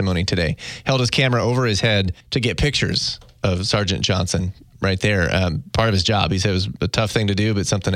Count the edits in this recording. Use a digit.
1